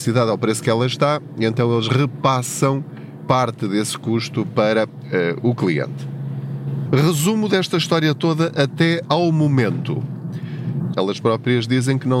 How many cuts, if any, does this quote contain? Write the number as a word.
two